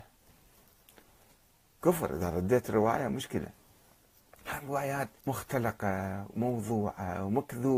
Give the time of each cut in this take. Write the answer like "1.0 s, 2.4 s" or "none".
5.2 s